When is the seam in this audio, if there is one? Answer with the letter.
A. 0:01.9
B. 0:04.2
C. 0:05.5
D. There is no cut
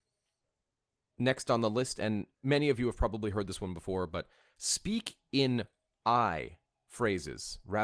D